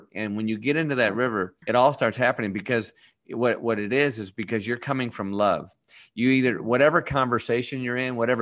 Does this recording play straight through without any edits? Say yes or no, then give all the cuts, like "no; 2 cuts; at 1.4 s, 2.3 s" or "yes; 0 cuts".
no; 1 cut; at 1.6 s